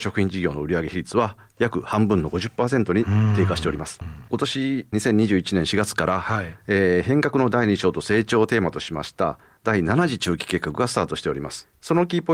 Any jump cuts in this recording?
yes; 1 cut; at 4.0 s

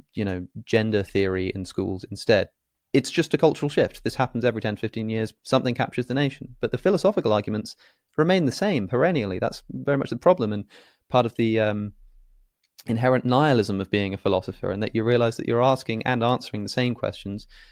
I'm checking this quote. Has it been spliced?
no; 0 cuts

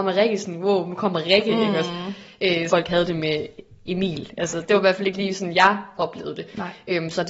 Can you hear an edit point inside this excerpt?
yes; 1 cut; at 2.7 s

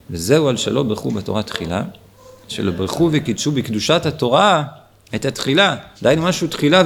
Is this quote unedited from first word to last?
no; 1 cut; at 5.9 s

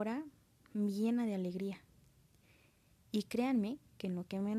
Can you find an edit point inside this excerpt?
no; 0 cuts

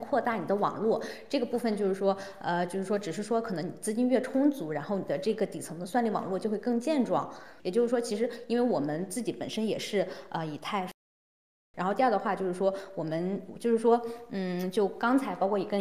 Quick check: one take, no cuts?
no; 2 cuts; at 7.6 s, 11.7 s

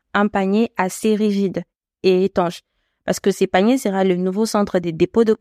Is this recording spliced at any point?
no; 0 cuts

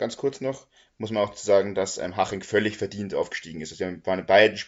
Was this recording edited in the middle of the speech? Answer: no; 0 cuts

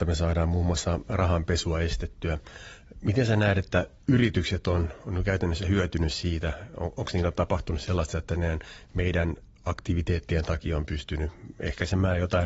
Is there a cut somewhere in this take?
no; 0 cuts

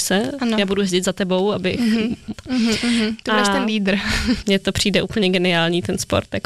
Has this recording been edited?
yes; 2 cuts; at 2.3 s, 4.4 s

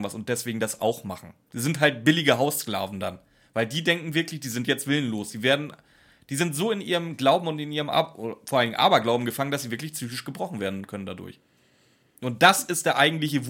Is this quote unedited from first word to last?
no; 1 cut; at 1.4 s

